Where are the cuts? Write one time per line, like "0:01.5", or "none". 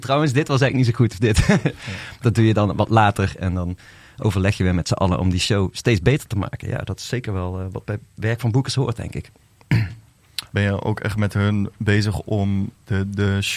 0:10.5